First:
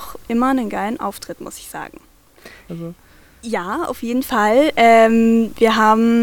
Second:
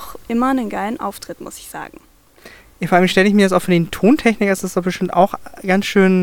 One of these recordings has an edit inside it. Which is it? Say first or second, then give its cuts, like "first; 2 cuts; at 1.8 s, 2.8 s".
first; 1 cut; at 2.7 s